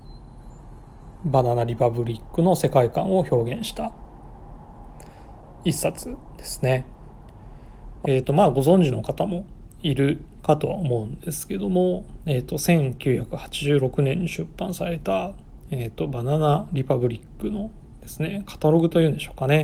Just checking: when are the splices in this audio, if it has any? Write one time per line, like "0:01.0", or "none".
0:08.0